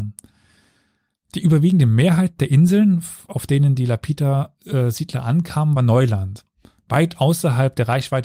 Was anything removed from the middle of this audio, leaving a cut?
no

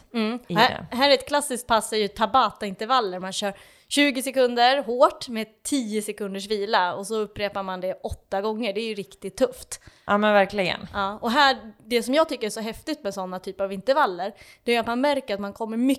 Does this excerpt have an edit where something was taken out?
no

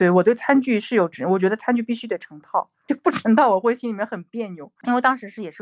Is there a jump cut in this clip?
no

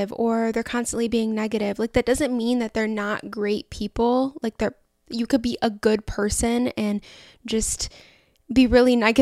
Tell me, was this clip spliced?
no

